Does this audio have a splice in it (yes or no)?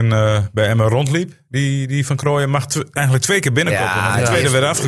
no